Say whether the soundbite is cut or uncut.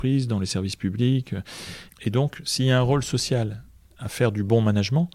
cut